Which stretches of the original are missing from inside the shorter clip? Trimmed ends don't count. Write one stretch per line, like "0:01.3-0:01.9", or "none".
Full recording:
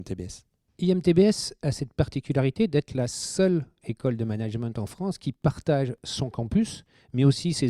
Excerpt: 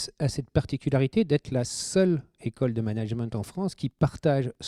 none